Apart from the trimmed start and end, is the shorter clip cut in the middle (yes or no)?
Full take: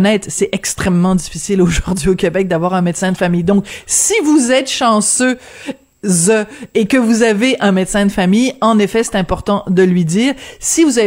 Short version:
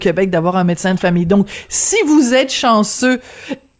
no